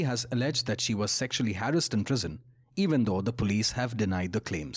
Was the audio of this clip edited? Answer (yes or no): no